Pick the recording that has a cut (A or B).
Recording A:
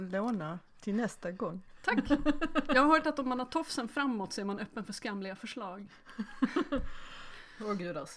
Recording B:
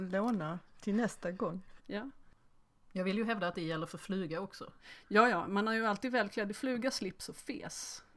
B